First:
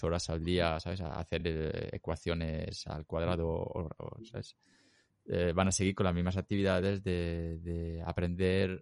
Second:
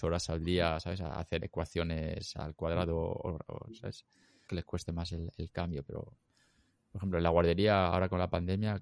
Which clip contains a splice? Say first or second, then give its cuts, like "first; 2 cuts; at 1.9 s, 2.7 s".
second; 2 cuts; at 1.4 s, 4.5 s